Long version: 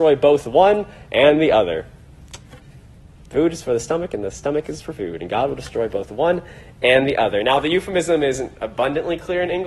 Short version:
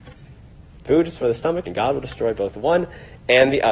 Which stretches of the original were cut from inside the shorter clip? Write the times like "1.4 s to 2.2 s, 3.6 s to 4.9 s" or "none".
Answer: 4.1 s to 5.2 s